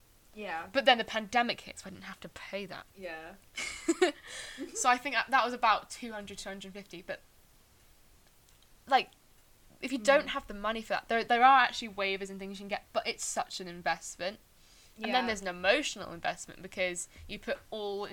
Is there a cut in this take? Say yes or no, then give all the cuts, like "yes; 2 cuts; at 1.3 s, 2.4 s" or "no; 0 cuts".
yes; 1 cut; at 2.9 s